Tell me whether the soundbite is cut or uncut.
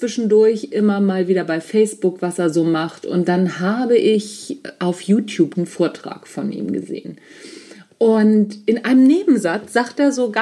cut